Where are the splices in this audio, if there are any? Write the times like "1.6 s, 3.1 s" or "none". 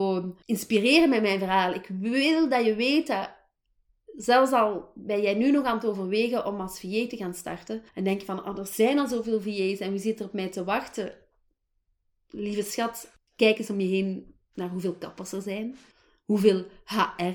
none